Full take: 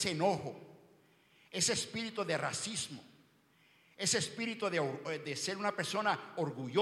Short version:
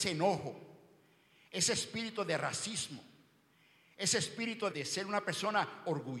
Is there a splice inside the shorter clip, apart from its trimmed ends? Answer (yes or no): yes